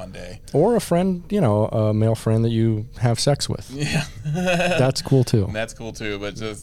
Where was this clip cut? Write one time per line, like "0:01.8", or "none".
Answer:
none